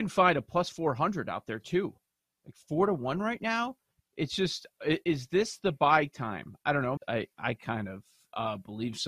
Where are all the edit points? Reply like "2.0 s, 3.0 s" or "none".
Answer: 7.0 s